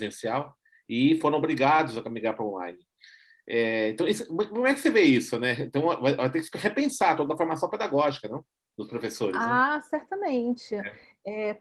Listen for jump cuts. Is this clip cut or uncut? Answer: uncut